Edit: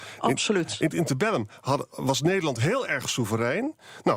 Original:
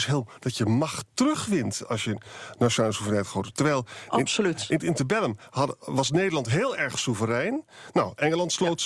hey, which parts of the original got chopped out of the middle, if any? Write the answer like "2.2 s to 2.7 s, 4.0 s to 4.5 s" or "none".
none